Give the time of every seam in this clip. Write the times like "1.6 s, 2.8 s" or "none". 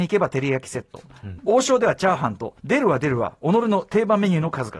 1.4 s